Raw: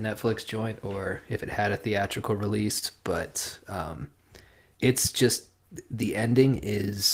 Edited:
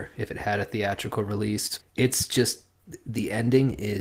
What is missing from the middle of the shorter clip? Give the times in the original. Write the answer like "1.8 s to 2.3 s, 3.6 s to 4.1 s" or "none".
2.9 s to 4.7 s